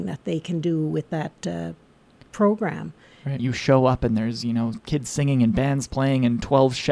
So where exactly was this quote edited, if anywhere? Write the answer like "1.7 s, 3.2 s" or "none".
3.4 s